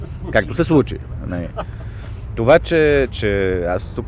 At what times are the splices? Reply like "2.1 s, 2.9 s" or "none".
3.1 s